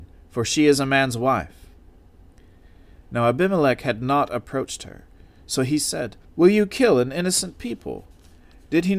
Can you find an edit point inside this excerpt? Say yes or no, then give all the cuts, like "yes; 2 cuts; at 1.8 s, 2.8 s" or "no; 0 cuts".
yes; 1 cut; at 6.2 s